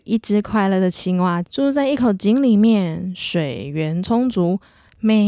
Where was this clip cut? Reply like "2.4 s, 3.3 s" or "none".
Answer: 1.4 s